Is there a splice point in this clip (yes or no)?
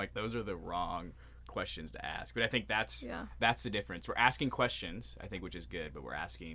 no